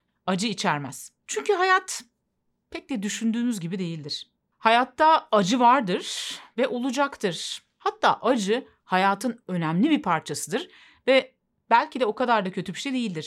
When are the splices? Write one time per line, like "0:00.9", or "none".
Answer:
0:01.3